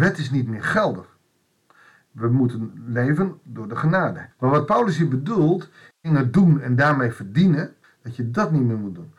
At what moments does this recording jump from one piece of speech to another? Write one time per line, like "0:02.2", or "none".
0:04.3
0:05.9
0:07.8